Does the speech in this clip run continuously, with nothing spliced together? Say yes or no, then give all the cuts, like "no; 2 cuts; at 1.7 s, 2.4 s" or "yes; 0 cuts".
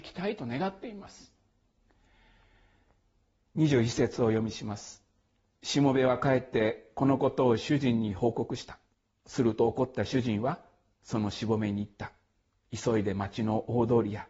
yes; 0 cuts